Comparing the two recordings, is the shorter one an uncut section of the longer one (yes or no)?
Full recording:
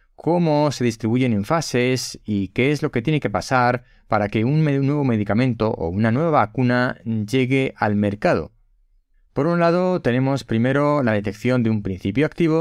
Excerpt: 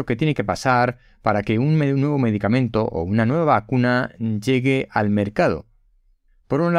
yes